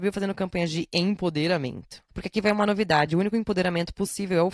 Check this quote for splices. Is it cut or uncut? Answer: uncut